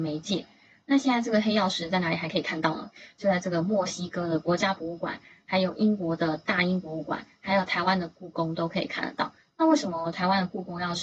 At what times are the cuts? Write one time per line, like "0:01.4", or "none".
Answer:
none